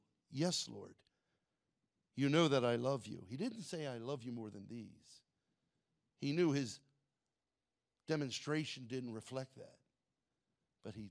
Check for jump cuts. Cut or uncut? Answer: uncut